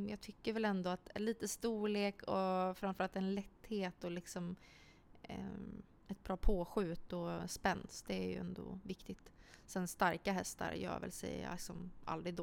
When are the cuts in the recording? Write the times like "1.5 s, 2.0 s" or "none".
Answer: none